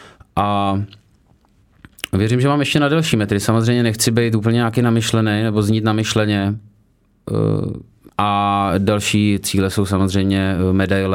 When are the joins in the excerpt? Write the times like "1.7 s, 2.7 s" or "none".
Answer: 8.1 s